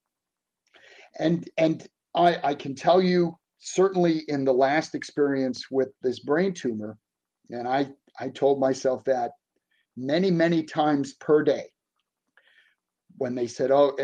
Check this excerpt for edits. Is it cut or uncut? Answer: uncut